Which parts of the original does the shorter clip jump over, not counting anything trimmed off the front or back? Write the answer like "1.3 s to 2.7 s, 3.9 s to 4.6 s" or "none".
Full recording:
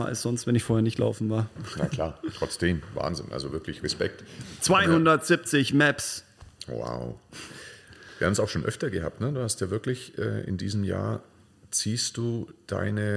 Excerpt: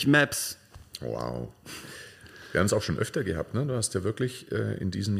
none